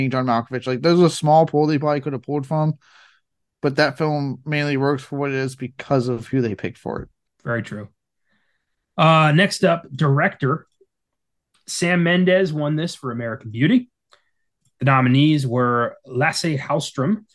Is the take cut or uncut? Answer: cut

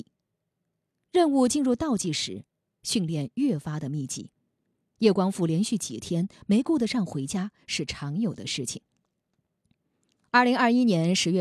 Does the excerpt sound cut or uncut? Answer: uncut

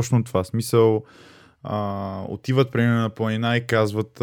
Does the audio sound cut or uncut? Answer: uncut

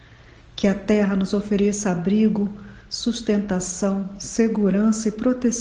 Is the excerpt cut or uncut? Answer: uncut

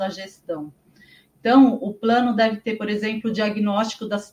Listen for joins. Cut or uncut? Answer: uncut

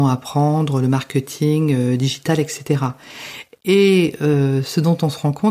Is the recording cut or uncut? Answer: uncut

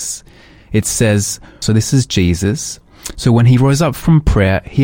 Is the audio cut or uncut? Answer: cut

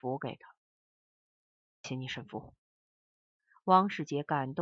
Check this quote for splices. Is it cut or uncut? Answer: cut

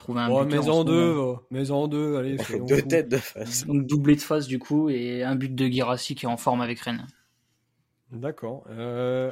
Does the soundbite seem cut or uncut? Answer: cut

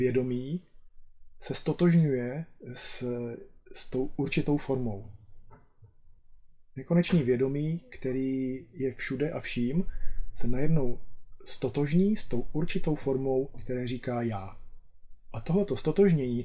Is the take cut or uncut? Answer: uncut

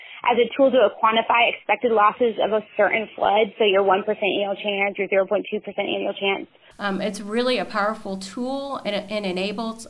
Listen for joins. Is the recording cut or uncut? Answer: cut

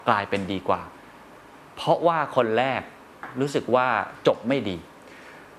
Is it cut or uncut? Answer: uncut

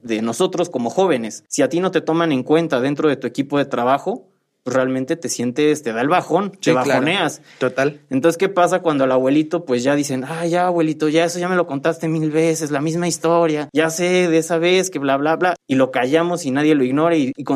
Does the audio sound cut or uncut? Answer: uncut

